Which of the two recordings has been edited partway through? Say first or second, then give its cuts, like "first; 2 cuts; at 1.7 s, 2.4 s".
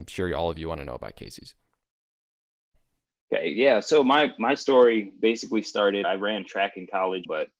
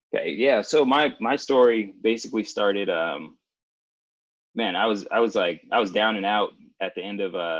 first; 1 cut; at 6.0 s